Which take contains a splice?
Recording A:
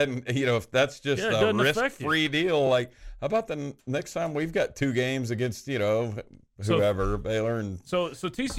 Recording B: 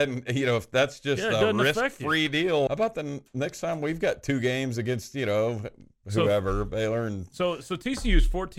B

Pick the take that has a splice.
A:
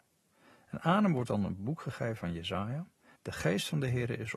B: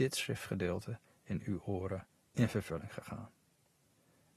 A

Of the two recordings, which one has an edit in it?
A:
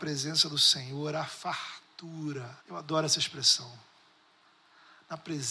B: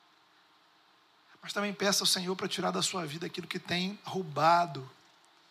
A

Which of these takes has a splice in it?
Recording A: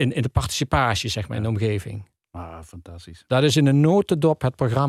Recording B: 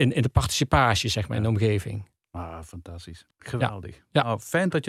B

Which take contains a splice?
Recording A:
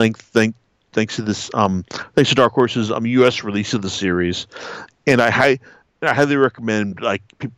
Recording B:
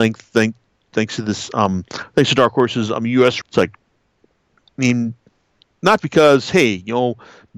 B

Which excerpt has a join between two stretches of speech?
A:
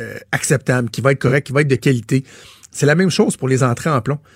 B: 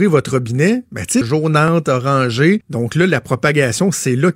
B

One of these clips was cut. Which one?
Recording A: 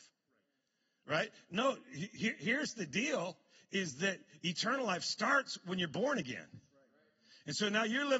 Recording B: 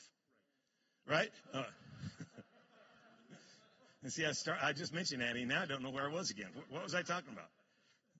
B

